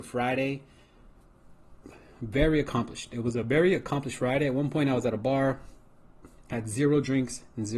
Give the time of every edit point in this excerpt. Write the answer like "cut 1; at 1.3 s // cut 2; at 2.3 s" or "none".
none